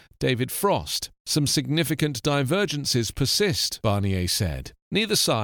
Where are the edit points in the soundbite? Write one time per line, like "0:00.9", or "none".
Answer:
none